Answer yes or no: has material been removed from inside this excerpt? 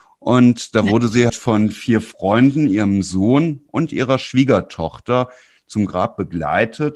yes